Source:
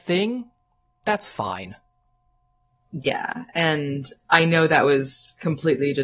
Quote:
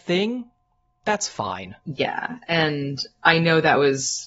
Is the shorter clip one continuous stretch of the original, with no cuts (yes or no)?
no